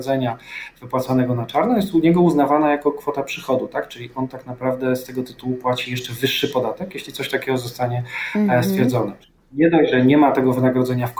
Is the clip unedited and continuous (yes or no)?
yes